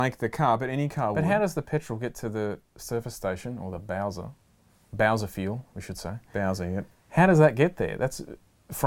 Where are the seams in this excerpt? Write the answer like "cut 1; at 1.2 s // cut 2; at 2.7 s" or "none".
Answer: none

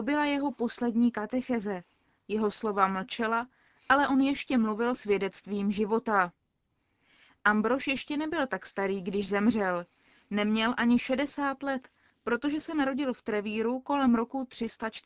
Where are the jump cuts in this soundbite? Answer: none

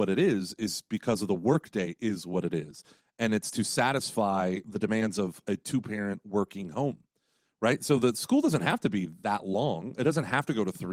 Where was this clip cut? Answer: none

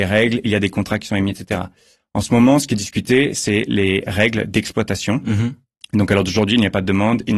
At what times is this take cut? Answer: none

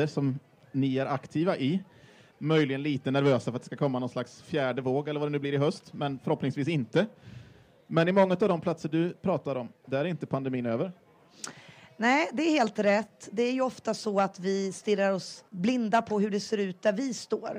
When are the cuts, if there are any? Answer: cut 1; at 2.3 s // cut 2; at 15.5 s

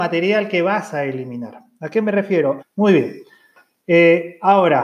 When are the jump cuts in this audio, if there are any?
cut 1; at 2.6 s

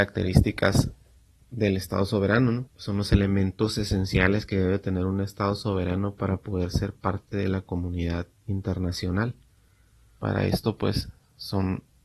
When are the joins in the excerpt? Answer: cut 1; at 2.7 s // cut 2; at 10.2 s

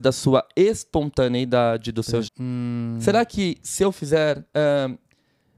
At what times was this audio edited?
cut 1; at 2.2 s

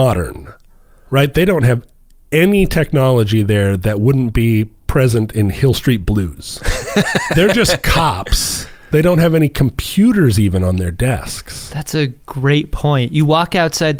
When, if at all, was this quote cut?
cut 1; at 8.9 s

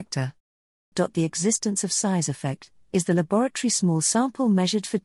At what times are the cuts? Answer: cut 1; at 0.9 s

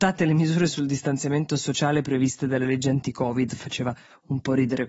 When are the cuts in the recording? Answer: none

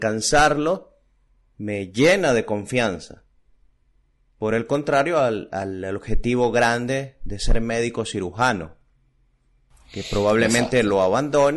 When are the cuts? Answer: none

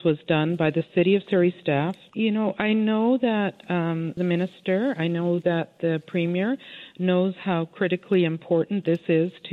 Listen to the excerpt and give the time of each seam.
cut 1; at 2.1 s // cut 2; at 4.2 s

